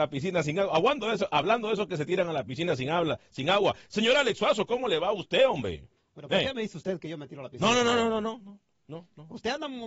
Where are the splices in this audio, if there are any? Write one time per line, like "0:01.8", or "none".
0:06.0